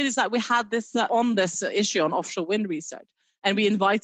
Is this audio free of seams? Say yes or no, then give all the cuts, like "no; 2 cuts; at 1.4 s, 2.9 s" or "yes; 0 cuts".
no; 1 cut; at 1.1 s